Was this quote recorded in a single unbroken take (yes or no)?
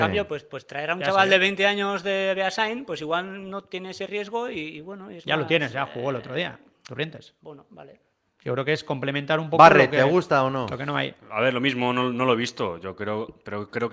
yes